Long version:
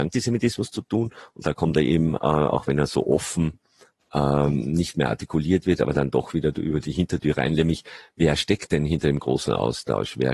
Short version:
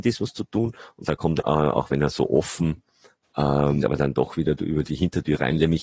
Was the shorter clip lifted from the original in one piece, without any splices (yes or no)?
no